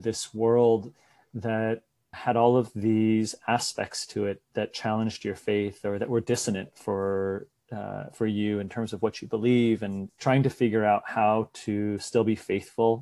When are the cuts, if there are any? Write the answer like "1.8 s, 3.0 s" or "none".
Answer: 2.1 s, 10.1 s